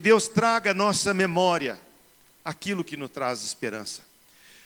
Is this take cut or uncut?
uncut